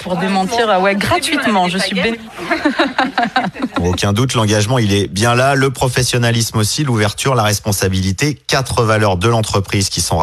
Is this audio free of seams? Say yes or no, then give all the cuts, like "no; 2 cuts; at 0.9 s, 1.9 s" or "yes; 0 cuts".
no; 1 cut; at 2.1 s